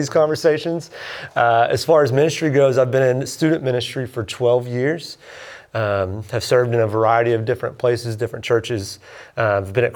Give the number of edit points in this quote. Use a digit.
0